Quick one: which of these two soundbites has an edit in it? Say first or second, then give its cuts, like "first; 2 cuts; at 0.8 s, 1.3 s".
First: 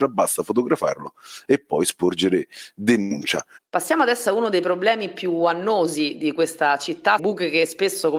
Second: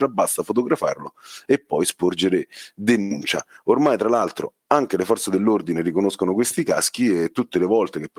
first; 2 cuts; at 3.6 s, 7.2 s